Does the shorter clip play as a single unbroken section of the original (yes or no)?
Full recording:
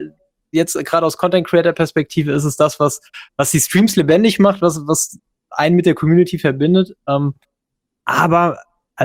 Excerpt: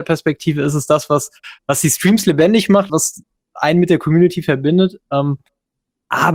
no